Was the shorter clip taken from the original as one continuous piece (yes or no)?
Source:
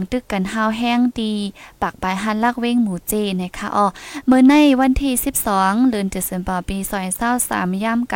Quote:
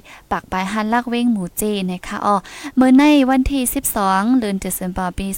yes